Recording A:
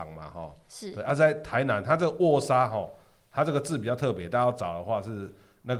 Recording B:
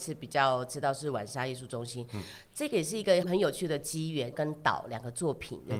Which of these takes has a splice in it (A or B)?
B